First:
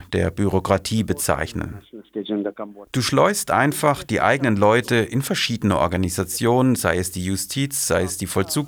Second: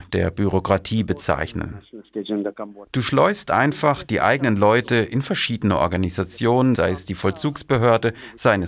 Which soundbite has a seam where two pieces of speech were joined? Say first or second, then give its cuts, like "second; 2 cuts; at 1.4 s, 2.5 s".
second; 1 cut; at 6.8 s